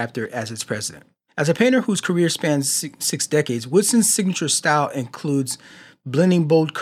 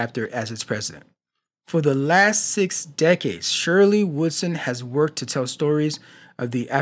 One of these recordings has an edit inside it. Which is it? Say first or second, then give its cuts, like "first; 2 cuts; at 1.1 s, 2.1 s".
first; 1 cut; at 1.3 s